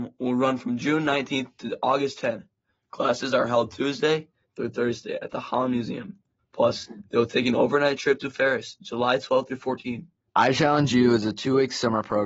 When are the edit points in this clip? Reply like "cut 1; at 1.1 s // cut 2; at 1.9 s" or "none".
cut 1; at 6.4 s // cut 2; at 10.3 s